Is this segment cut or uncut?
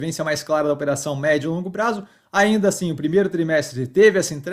uncut